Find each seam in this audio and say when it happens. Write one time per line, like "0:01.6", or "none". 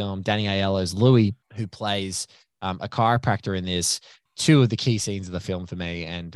0:01.4
0:04.3